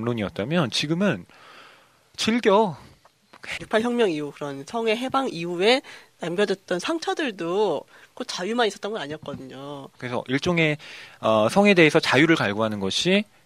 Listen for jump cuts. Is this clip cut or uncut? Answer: cut